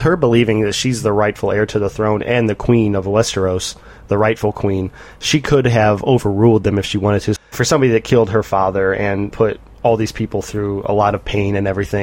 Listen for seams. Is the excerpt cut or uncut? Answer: cut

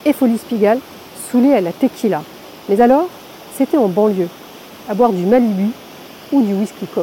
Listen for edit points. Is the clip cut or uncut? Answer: uncut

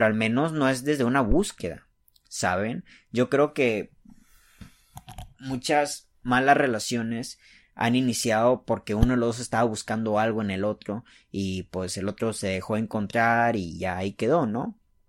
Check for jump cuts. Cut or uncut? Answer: uncut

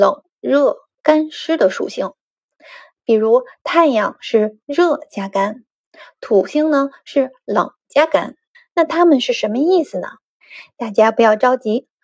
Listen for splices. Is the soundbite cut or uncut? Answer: uncut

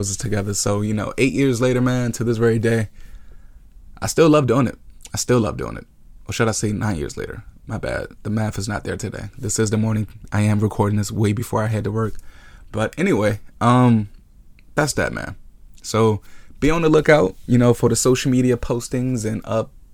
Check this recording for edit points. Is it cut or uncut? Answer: uncut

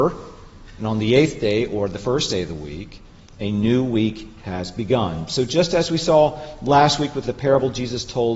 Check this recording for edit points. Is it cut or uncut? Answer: uncut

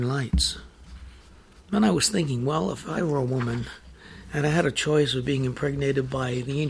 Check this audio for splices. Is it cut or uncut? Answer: uncut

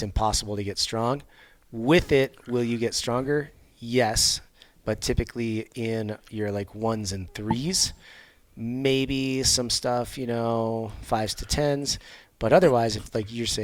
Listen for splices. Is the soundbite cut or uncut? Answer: uncut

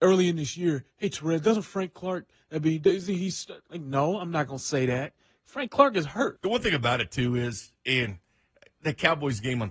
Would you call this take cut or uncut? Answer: cut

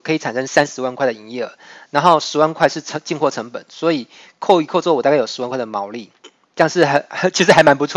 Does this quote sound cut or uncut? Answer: uncut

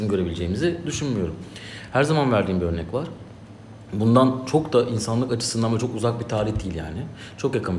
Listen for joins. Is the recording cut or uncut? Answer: uncut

